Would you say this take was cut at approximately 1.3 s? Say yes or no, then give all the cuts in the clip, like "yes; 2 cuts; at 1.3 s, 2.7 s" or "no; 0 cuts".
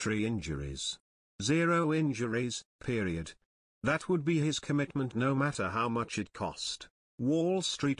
no; 1 cut; at 7.0 s